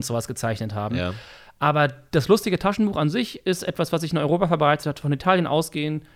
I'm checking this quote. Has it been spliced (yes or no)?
no